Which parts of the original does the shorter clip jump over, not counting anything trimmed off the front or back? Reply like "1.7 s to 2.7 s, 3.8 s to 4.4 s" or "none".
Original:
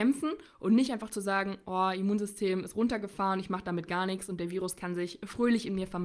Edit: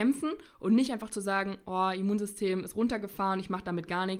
none